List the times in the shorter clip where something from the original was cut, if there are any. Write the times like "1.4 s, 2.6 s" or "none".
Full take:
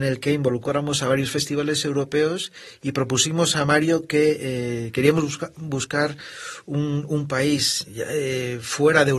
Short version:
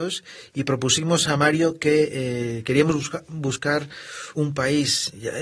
4.3 s